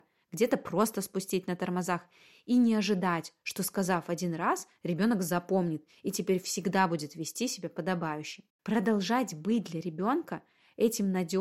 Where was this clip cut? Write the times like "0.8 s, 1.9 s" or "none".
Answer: none